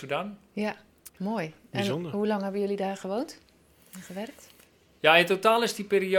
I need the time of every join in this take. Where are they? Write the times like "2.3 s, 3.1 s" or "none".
1.1 s